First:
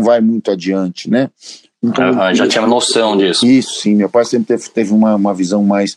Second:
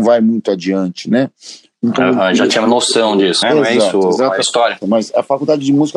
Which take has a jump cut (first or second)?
second